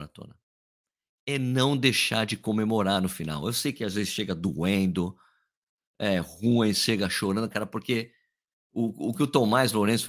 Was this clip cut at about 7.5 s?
yes; 1 cut; at 7.5 s

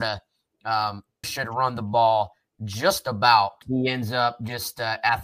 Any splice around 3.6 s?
yes; 2 cuts; at 1.2 s, 3.6 s

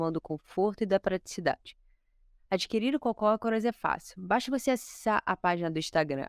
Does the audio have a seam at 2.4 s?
no; 0 cuts

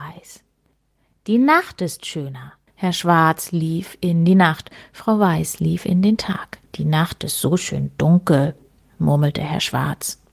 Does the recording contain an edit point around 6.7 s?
yes; 2 cuts; at 2.7 s, 6.7 s

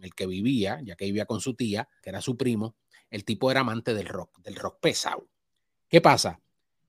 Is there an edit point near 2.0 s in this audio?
yes; 1 cut; at 2.0 s

